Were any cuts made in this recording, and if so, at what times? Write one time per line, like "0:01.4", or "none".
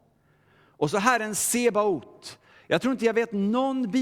none